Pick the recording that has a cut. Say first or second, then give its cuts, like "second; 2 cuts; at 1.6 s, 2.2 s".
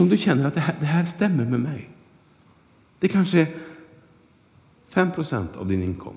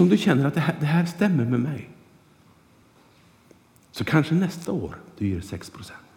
first; 1 cut; at 2.8 s